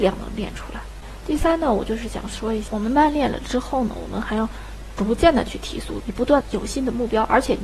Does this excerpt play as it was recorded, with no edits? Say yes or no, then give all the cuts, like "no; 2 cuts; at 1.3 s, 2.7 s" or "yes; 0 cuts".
no; 1 cut; at 6.0 s